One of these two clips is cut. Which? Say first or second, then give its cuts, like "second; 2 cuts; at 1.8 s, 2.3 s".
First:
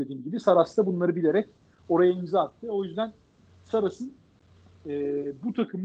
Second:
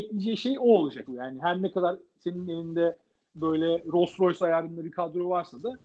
second; 1 cut; at 1.1 s